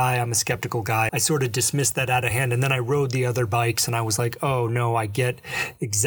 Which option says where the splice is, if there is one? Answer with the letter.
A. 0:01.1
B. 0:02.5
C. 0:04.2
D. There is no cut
A